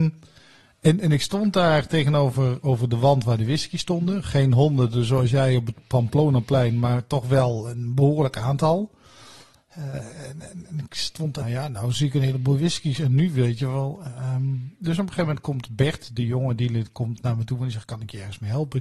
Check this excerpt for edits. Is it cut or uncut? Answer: cut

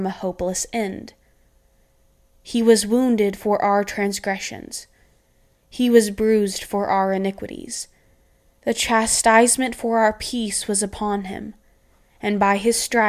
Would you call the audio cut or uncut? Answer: uncut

